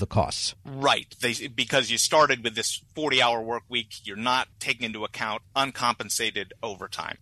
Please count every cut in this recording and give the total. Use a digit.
0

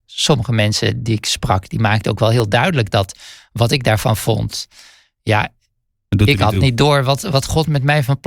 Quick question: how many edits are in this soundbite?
0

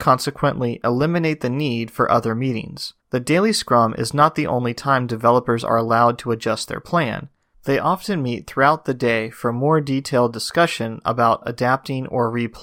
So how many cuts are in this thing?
1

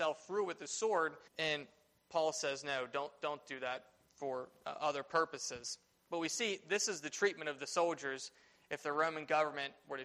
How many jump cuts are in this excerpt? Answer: 1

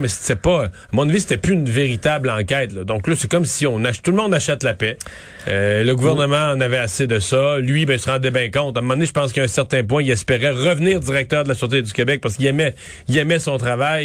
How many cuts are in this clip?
0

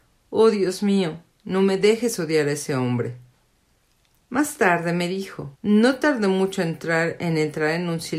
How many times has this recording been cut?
2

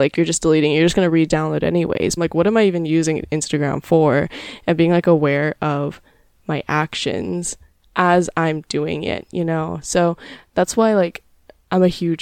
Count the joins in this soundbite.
1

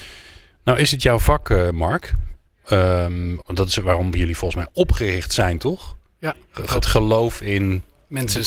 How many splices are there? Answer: 1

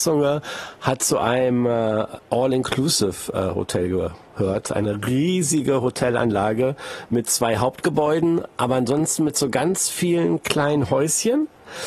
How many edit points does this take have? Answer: 0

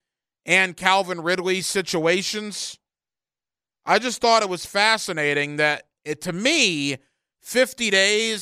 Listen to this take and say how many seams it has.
0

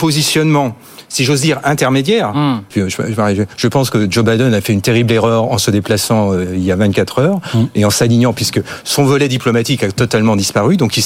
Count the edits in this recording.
1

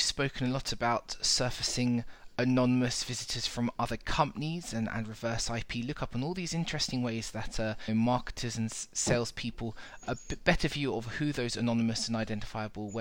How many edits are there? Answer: 1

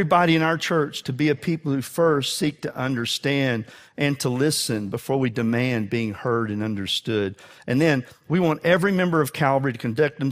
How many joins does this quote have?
0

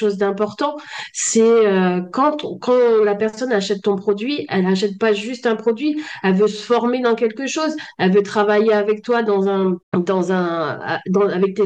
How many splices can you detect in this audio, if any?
1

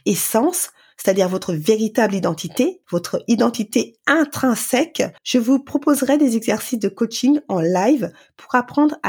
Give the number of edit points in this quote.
2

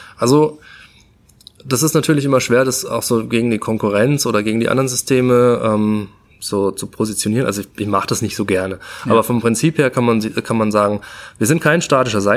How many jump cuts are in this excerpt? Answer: 0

